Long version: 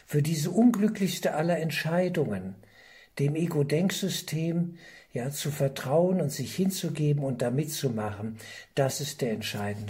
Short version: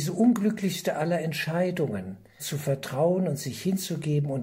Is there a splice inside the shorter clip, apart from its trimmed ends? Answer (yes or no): yes